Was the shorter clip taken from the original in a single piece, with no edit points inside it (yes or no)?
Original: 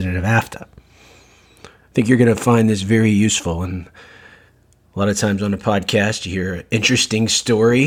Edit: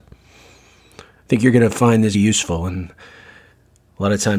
no